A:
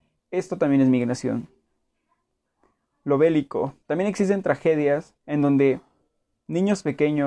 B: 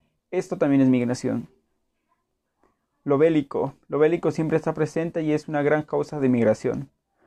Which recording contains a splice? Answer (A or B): A